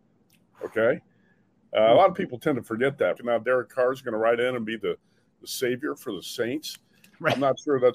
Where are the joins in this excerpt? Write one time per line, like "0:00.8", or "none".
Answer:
0:03.2